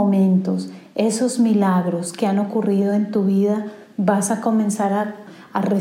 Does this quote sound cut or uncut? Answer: uncut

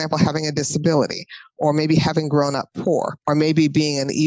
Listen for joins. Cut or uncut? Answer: uncut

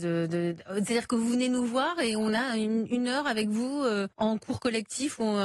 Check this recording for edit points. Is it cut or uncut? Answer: cut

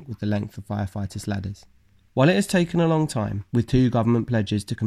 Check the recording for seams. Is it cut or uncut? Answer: cut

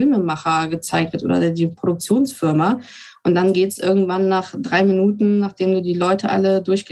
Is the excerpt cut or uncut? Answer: uncut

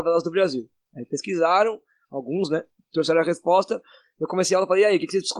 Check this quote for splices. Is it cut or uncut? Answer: uncut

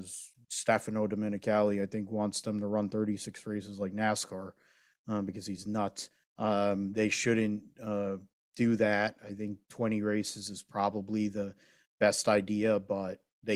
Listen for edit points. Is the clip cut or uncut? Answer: uncut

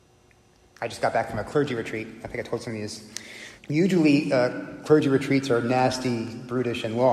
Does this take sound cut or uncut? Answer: cut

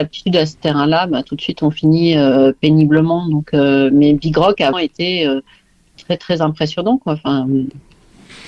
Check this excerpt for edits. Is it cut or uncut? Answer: cut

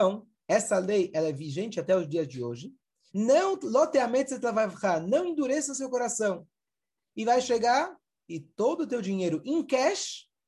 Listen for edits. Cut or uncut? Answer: cut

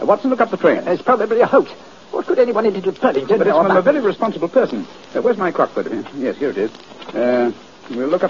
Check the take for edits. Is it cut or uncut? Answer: uncut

